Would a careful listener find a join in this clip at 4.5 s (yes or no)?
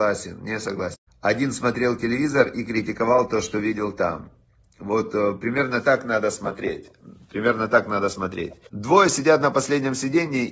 no